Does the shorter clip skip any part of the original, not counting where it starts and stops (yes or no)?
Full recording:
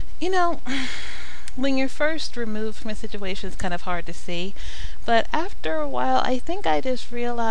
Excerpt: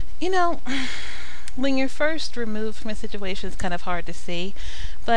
no